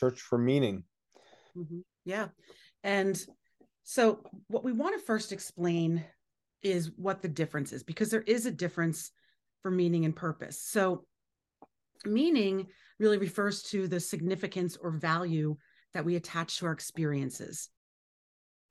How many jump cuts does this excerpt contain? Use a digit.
1